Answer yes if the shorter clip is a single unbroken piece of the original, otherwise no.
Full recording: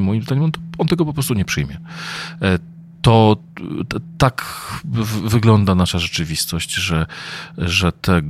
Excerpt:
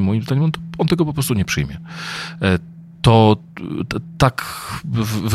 yes